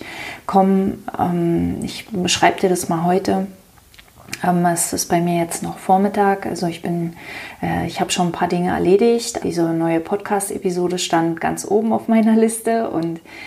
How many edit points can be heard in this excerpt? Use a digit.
1